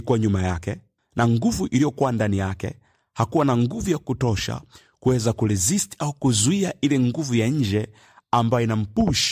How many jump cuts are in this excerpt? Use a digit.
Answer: 1